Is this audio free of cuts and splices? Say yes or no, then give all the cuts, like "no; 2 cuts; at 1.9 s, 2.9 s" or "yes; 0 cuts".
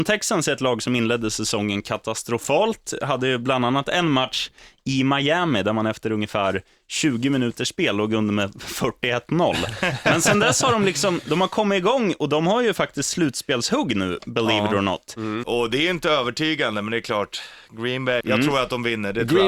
no; 2 cuts; at 15.4 s, 18.2 s